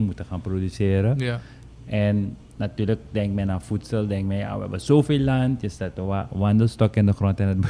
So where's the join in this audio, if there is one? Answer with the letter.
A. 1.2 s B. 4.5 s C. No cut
C